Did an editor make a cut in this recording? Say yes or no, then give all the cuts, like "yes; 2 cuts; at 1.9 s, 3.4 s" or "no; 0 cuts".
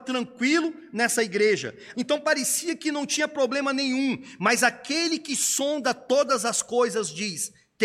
yes; 1 cut; at 1.9 s